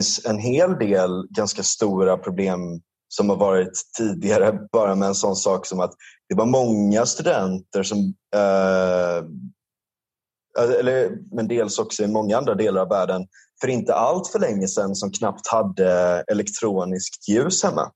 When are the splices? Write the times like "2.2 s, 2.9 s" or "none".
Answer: 11.3 s